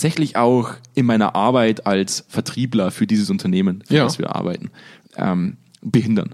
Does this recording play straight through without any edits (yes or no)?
yes